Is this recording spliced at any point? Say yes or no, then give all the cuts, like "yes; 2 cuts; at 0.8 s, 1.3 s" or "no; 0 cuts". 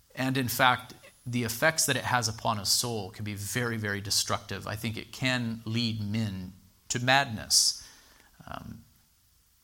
no; 0 cuts